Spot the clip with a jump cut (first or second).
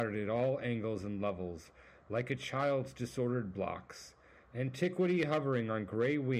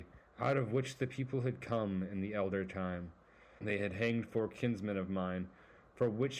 second